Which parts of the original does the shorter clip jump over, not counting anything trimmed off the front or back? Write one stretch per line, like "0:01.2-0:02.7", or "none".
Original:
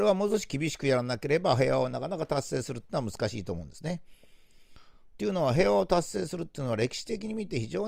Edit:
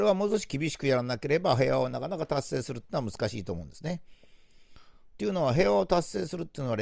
none